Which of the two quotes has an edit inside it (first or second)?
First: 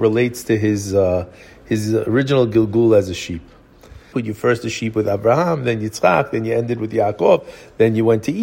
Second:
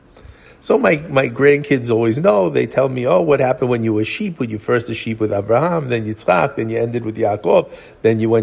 first